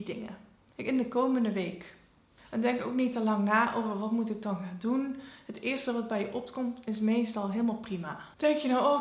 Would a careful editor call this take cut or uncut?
uncut